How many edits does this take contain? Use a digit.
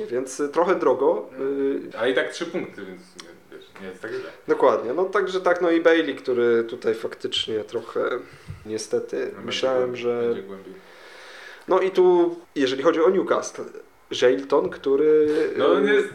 3